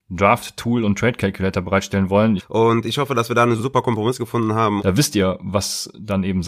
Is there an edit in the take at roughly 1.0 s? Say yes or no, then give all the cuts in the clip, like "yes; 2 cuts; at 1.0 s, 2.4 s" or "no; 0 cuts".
no; 3 cuts; at 2.4 s, 3.6 s, 4.8 s